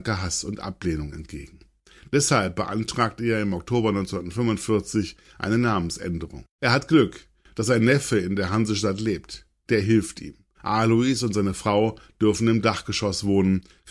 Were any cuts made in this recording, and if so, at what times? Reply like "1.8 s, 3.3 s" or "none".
6.6 s, 10.5 s